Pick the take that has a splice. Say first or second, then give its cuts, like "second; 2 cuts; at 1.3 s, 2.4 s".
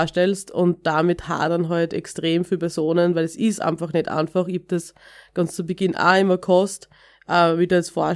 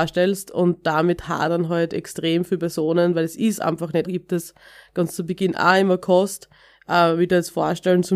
second; 1 cut; at 4.0 s